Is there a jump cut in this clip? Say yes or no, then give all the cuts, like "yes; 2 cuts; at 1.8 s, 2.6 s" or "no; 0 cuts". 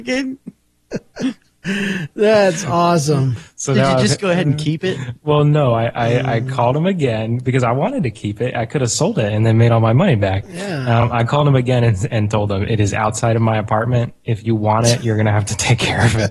no; 0 cuts